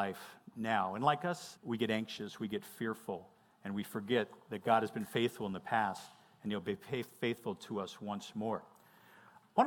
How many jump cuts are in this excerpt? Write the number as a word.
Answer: one